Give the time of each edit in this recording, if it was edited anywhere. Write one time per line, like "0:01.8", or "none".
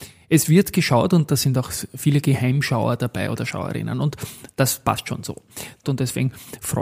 0:05.8